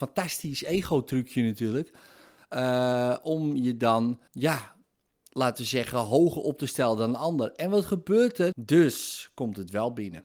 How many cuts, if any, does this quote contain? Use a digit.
2